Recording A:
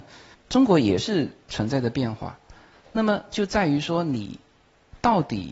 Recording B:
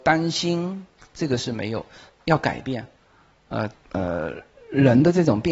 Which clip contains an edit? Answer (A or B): B